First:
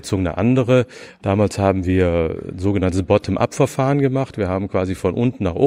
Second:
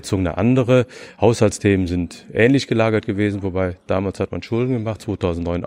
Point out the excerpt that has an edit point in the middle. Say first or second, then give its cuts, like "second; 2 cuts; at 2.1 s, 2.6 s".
first; 1 cut; at 1.2 s